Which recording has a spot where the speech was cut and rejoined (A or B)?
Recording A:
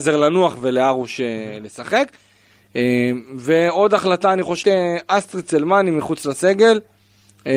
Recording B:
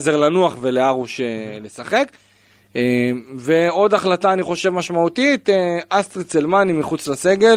A